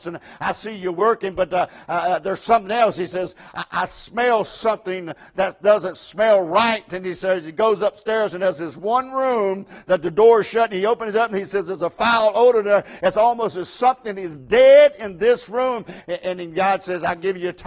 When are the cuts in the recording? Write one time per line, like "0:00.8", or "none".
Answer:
0:16.0